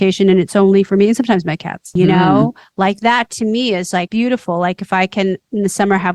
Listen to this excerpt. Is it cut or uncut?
cut